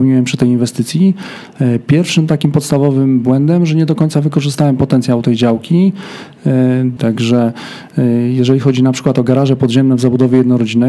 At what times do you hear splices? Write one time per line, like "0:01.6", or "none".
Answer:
0:07.0

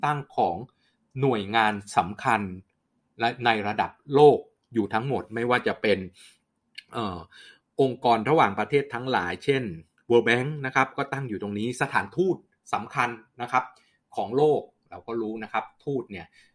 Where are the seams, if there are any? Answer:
none

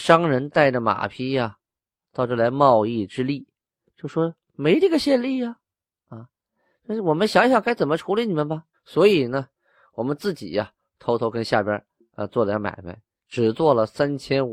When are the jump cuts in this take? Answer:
0:08.7

